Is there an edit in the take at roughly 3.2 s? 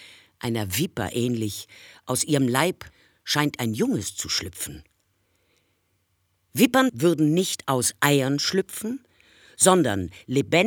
no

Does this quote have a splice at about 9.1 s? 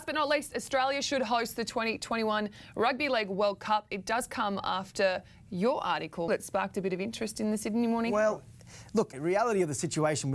yes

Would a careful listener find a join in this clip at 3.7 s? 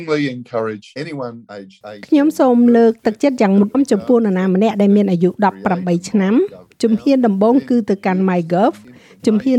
yes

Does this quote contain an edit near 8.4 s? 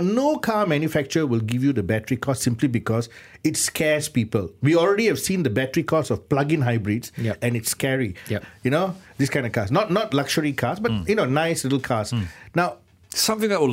yes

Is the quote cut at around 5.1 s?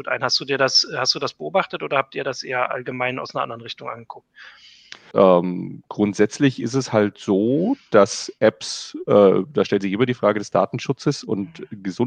yes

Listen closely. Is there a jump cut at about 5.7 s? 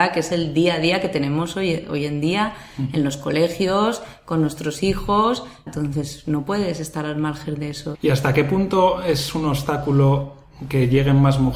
yes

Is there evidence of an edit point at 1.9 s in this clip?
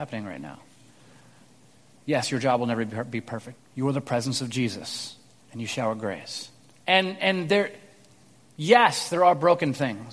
yes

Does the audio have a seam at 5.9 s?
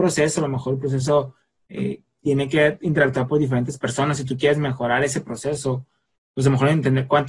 no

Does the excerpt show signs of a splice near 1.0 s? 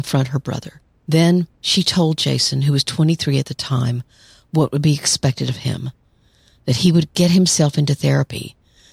yes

